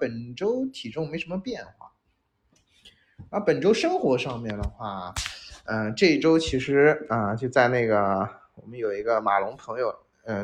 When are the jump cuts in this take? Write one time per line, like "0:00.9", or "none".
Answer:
none